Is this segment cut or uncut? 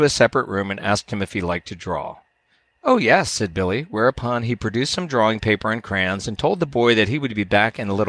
uncut